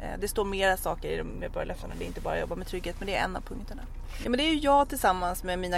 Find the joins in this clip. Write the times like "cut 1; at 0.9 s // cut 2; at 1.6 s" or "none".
cut 1; at 4.2 s